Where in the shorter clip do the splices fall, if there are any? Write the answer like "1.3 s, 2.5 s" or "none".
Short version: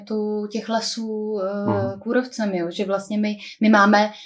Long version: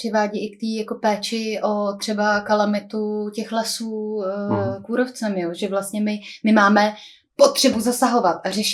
none